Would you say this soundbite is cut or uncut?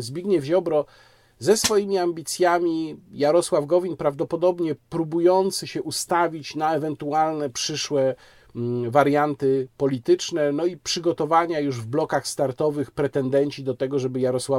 uncut